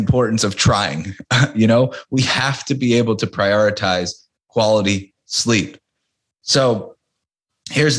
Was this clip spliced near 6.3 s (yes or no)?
yes